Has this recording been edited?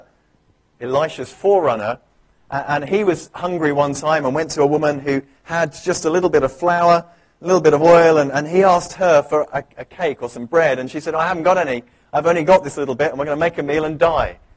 no; 0 cuts

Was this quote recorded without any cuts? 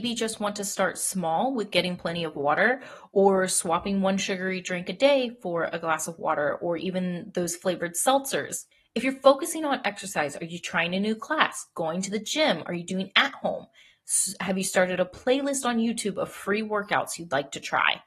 yes; 0 cuts

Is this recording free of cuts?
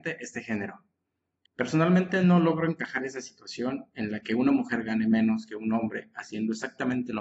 no; 1 cut; at 1.5 s

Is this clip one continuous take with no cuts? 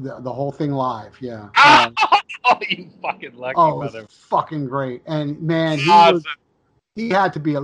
yes; 0 cuts

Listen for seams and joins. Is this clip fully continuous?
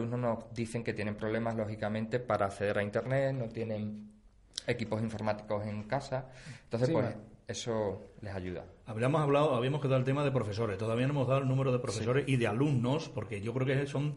yes; 0 cuts

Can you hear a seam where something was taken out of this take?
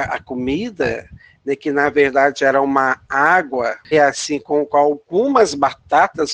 yes; 1 cut; at 3.9 s

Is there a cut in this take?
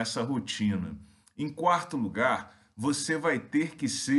no; 0 cuts

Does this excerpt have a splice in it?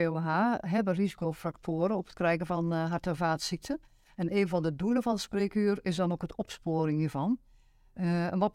no; 0 cuts

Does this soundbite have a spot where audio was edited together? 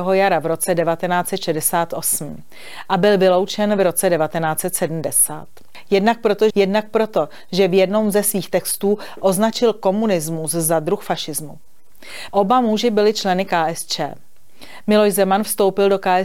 yes; 2 cuts; at 6.5 s, 12.3 s

